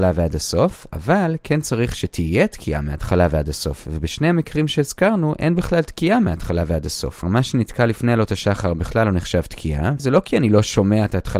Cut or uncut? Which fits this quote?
cut